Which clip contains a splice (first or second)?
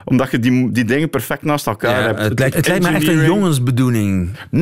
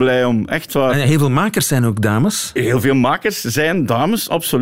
first